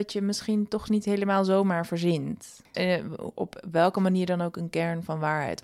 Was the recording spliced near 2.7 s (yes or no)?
yes